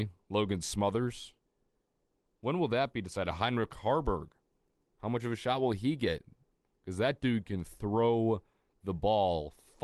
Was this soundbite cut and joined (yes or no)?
no